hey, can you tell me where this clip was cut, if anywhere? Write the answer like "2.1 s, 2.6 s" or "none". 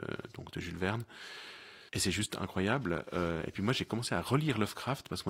1.9 s